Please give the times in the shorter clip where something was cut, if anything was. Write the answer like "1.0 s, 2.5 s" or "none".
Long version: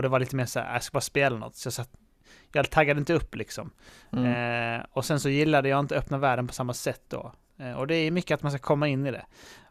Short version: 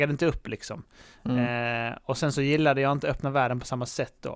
none